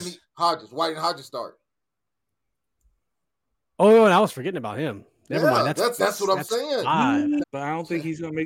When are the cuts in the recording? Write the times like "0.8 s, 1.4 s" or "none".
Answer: 3.7 s, 6.0 s, 7.4 s